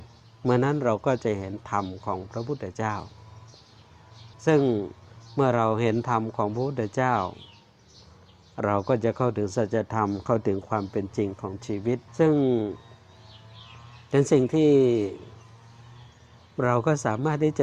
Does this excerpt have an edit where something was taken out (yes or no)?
yes